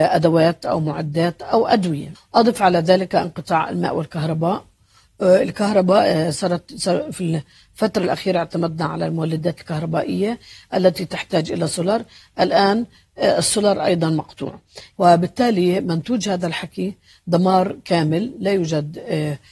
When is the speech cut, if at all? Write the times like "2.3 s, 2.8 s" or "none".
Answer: 2.1 s, 14.9 s